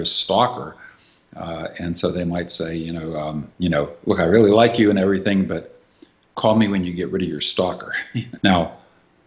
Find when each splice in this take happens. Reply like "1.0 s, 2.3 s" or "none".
3.5 s, 8.4 s